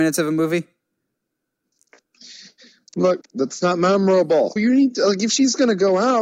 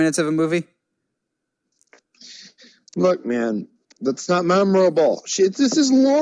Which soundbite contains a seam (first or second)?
first